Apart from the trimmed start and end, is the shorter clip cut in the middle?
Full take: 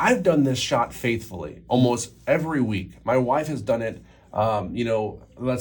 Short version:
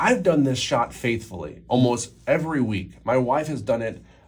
no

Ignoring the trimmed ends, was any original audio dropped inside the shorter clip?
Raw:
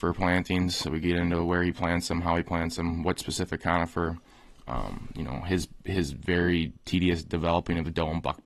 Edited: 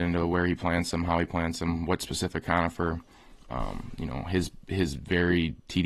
no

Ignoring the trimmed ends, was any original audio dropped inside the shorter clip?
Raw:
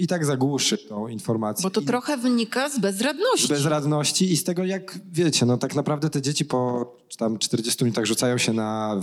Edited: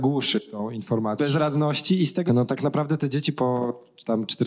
yes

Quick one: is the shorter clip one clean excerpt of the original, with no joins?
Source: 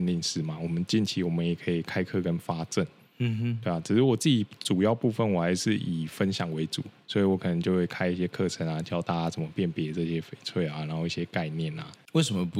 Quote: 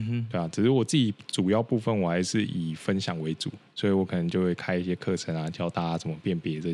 yes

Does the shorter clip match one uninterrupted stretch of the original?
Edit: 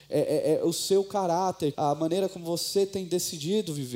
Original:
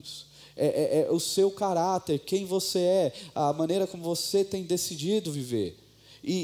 no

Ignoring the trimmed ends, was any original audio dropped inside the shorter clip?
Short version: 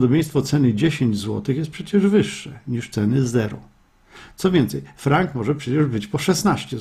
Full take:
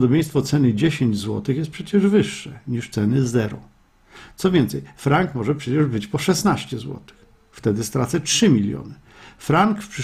no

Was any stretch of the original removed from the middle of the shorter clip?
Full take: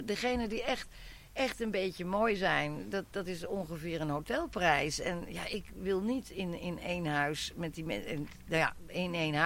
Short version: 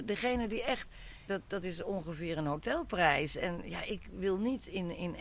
yes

